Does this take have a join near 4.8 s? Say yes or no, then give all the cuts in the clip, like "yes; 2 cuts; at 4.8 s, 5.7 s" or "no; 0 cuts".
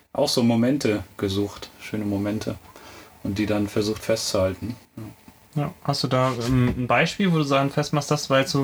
yes; 1 cut; at 4.8 s